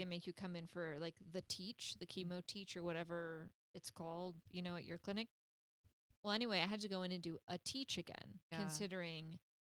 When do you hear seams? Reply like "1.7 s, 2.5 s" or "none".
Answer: 8.5 s

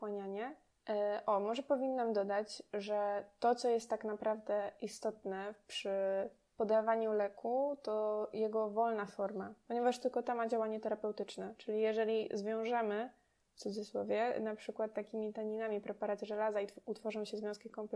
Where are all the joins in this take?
none

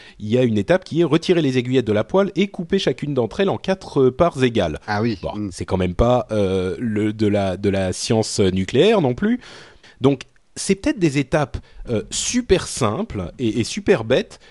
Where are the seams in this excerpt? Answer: 9.8 s

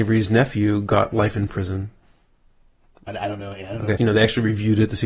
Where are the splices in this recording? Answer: 4.0 s

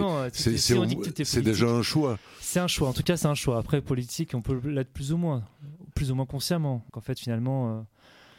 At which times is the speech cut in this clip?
6.9 s

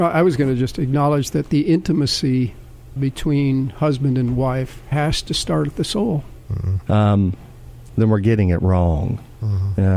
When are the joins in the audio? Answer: 3.0 s, 6.8 s, 7.9 s

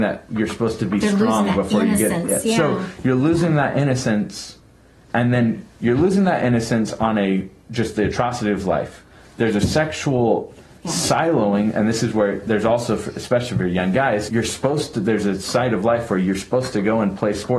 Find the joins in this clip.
14.3 s

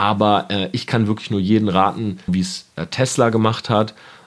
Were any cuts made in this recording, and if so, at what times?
2.3 s

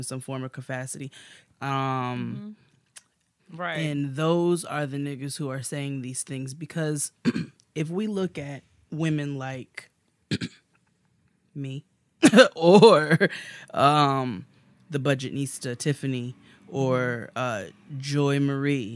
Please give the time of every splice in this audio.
1.5 s, 3.4 s

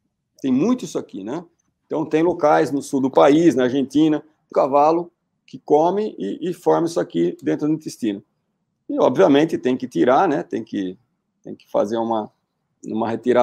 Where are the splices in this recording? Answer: 4.5 s

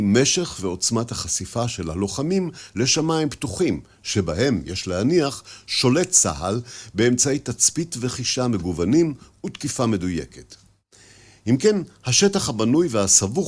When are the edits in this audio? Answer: none

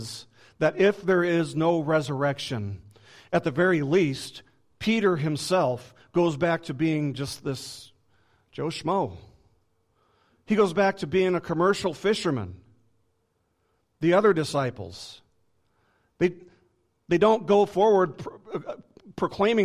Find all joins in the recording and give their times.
none

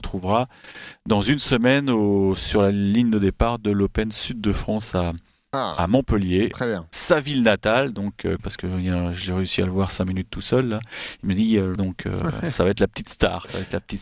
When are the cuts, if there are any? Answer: 8.4 s, 11.8 s

